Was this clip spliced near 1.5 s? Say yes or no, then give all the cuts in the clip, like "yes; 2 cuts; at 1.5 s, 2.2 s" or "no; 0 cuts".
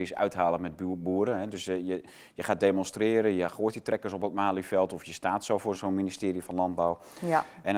no; 1 cut; at 5.7 s